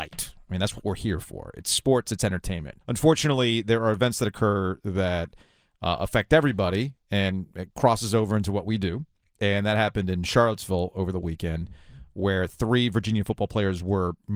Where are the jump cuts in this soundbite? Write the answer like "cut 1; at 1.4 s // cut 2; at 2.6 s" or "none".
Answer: cut 1; at 2.8 s